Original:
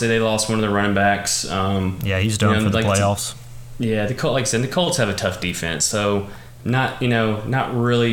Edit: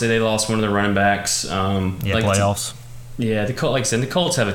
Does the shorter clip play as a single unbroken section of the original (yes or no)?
no